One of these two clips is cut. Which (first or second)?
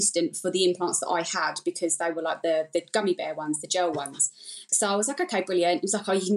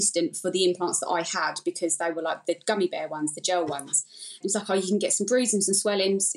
second